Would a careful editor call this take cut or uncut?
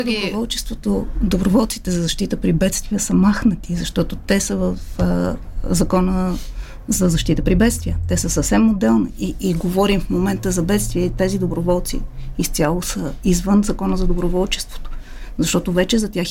uncut